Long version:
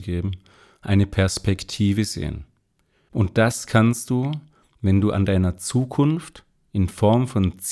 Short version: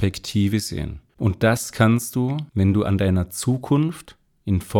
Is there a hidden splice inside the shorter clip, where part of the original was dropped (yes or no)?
yes